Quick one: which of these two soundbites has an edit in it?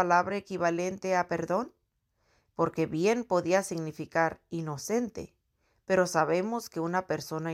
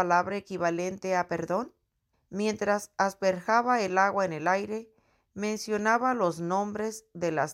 second; 1 cut; at 2.1 s

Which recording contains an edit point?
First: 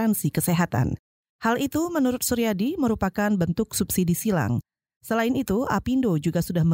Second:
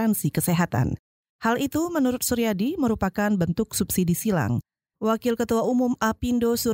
second; 1 cut; at 4.9 s

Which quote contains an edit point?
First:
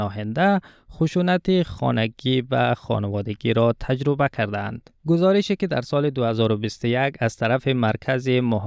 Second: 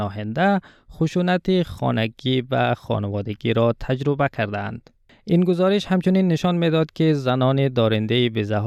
first; 1 cut; at 5.0 s

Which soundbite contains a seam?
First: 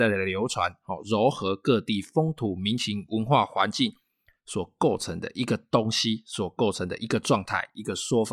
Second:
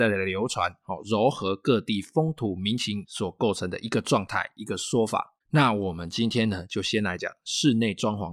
second; 3 cuts; at 3.1 s, 5.4 s, 7.2 s

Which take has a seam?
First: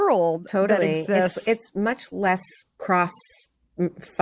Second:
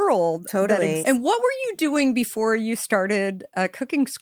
second; 1 cut; at 1.0 s

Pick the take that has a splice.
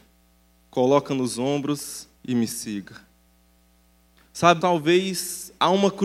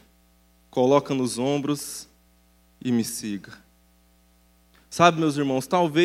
first; 2 cuts; at 2.2 s, 4.6 s

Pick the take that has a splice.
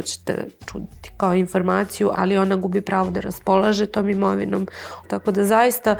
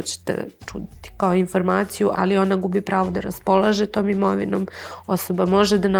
first; 1 cut; at 5.0 s

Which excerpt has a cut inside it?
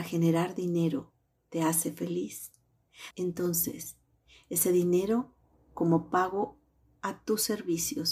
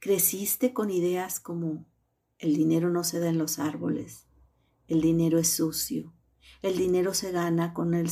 first; 1 cut; at 3.1 s

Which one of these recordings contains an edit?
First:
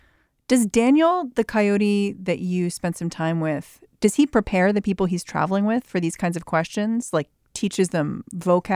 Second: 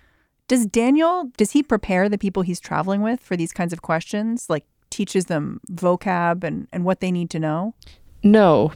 second; 1 cut; at 1.3 s

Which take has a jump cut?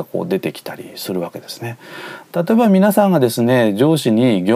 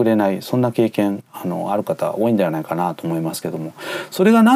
first; 1 cut; at 2.2 s

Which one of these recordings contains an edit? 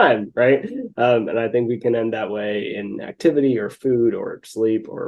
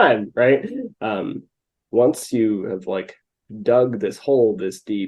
second; 1 cut; at 0.9 s

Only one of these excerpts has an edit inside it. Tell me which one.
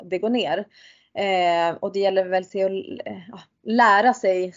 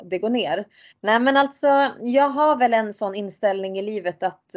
second; 1 cut; at 0.9 s

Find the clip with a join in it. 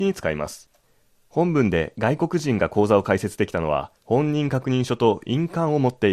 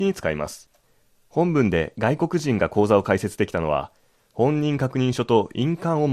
first; 1 cut; at 4.0 s

